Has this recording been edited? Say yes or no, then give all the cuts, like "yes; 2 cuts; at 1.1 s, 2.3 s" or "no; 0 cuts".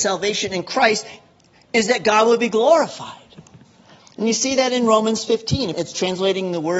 yes; 1 cut; at 5.7 s